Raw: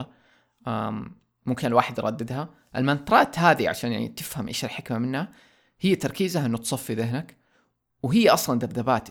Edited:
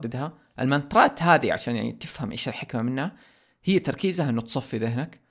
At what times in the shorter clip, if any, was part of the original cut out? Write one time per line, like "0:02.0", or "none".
none